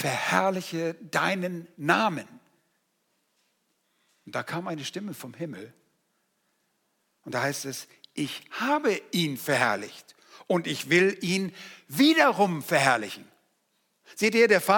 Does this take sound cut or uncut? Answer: uncut